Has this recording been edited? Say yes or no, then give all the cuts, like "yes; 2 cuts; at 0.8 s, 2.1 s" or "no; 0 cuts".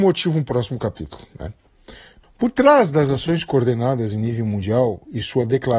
yes; 1 cut; at 2.2 s